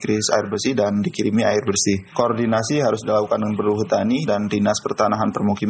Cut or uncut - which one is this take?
cut